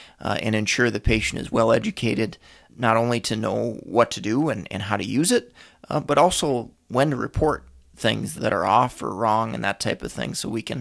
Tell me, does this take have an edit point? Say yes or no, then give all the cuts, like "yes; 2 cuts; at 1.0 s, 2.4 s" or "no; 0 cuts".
yes; 2 cuts; at 2.7 s, 8.4 s